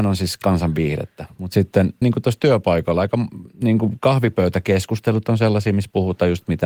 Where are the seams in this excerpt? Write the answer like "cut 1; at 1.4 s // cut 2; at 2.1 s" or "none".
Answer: cut 1; at 2.0 s // cut 2; at 3.5 s